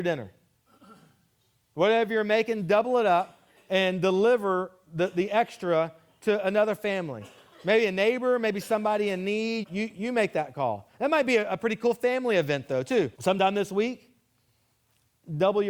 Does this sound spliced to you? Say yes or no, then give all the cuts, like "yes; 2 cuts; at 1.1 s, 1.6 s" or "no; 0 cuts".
yes; 2 cuts; at 9.6 s, 13.1 s